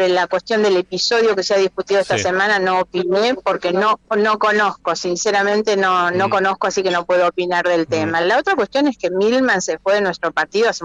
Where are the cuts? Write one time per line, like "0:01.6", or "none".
none